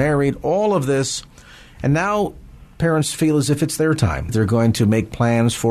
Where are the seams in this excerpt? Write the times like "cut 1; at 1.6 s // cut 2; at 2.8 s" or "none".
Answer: cut 1; at 4.3 s